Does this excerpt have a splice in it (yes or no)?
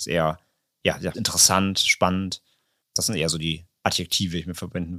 yes